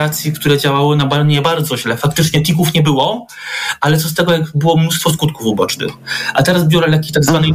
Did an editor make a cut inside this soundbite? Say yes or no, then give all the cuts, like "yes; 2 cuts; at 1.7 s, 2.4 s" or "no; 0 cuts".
no; 0 cuts